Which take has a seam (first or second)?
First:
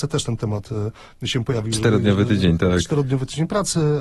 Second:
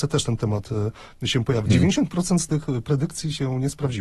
second